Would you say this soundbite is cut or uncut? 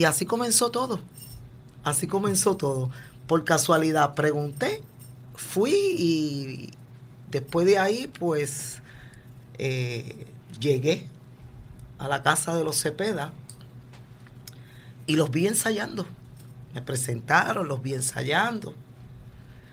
uncut